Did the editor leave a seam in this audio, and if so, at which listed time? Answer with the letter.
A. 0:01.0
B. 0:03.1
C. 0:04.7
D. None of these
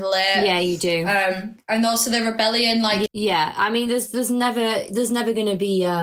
B